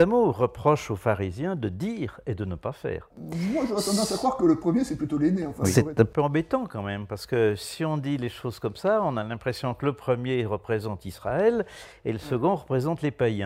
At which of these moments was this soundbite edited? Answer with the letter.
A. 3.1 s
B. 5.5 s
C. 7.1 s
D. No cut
A